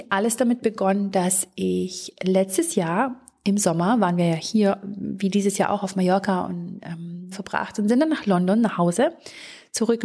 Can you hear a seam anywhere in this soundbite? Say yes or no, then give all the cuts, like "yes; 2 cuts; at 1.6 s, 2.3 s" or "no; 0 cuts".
yes; 1 cut; at 7.3 s